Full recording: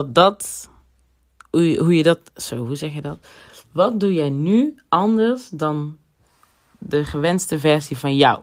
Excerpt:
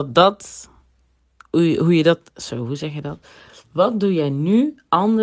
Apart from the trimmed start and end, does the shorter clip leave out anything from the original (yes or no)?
no